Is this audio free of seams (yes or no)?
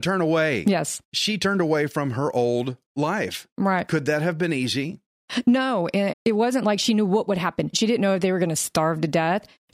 no